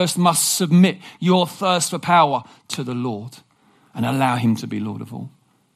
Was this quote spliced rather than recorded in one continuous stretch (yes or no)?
no